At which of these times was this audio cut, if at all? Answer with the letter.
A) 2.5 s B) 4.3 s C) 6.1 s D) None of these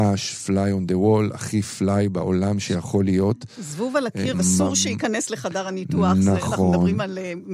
B